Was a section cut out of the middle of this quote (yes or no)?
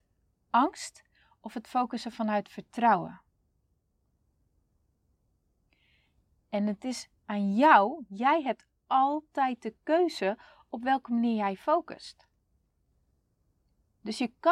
no